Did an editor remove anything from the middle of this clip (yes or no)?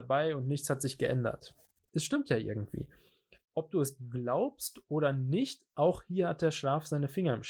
yes